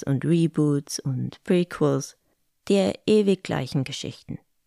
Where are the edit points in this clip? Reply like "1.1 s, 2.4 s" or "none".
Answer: none